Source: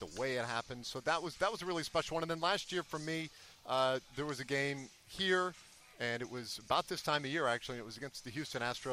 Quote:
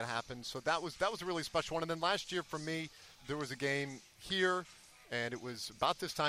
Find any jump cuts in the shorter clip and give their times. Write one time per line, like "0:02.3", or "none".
0:03.2